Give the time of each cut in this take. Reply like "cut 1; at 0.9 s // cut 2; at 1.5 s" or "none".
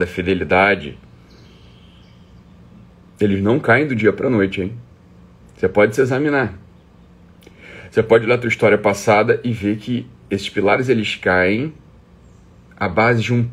none